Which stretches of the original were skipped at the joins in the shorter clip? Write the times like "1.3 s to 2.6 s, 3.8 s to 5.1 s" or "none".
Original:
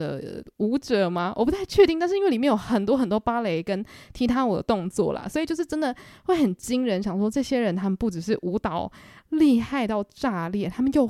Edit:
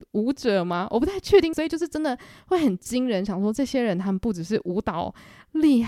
2.0 s to 5.3 s